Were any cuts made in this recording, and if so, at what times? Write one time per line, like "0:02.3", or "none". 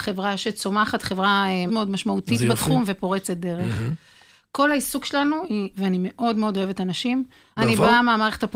0:01.7
0:05.7
0:07.6